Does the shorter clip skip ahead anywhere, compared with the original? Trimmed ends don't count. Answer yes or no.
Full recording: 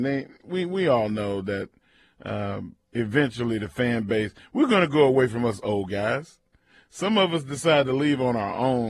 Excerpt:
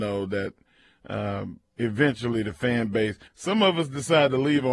yes